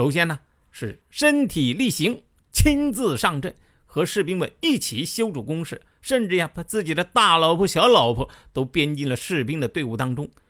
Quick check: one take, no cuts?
yes; 0 cuts

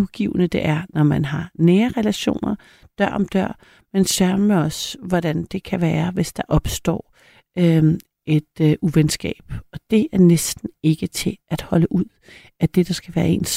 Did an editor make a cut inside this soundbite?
no; 0 cuts

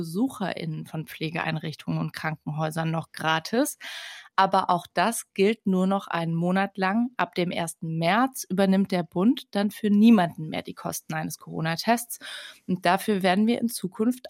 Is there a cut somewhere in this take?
no; 0 cuts

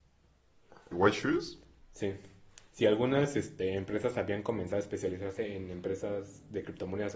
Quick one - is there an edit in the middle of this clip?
yes; 1 cut; at 0.9 s

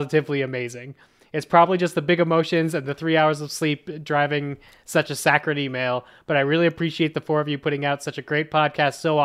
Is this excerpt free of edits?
yes; 0 cuts

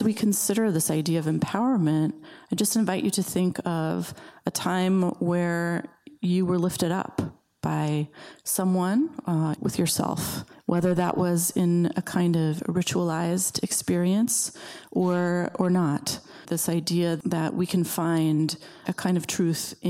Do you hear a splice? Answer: yes; 2 cuts; at 9.6 s, 16.4 s

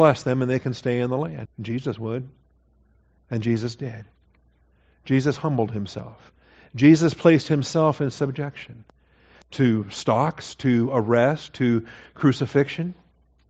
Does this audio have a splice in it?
yes; 1 cut; at 1.5 s

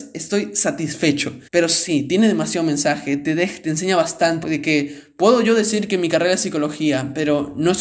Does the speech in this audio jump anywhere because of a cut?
yes; 2 cuts; at 1.5 s, 4.4 s

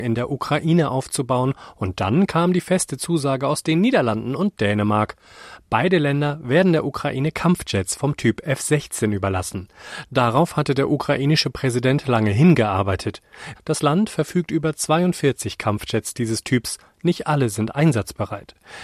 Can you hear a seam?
yes; 1 cut; at 13.6 s

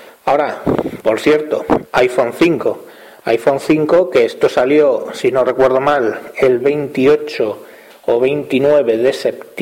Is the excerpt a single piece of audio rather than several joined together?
yes; 0 cuts

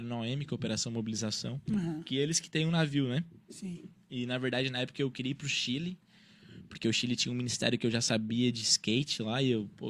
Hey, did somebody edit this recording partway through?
no; 0 cuts

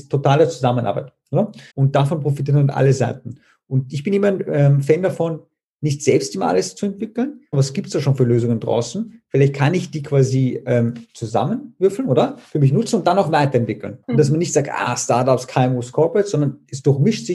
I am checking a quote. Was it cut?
yes; 3 cuts; at 1.7 s, 7.5 s, 14.0 s

